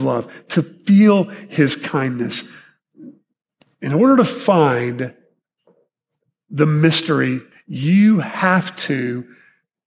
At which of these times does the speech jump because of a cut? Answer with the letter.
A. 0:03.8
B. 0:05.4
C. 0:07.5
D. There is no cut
C